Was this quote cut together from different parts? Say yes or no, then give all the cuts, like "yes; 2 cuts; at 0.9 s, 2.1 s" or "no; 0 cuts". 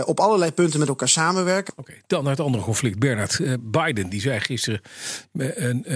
yes; 1 cut; at 1.7 s